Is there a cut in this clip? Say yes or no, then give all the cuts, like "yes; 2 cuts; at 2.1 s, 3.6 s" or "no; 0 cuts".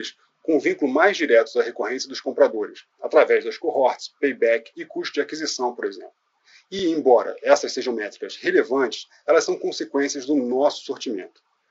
no; 0 cuts